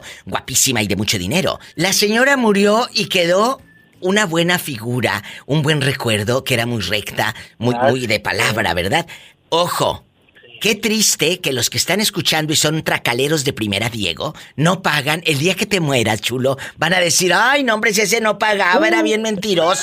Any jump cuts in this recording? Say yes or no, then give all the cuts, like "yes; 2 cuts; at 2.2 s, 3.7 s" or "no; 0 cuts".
yes; 1 cut; at 1.7 s